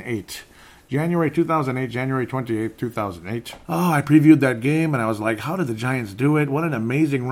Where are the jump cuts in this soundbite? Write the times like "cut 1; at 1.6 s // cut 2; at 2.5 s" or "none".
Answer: cut 1; at 3.6 s